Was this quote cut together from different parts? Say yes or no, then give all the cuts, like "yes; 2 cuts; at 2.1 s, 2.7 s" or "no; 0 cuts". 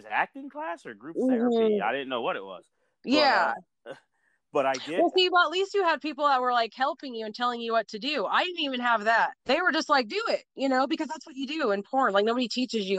yes; 1 cut; at 9.4 s